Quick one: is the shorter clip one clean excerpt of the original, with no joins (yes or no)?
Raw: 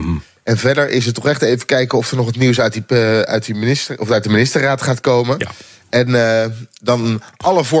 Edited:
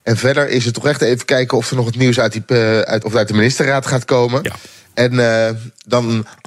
no